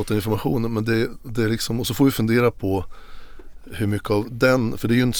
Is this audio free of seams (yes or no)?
yes